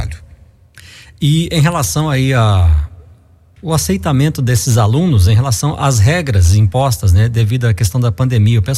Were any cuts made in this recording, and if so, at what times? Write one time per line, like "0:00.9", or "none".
none